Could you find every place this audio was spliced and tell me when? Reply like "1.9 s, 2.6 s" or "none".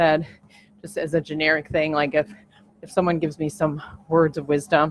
none